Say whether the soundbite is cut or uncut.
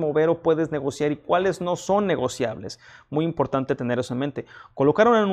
uncut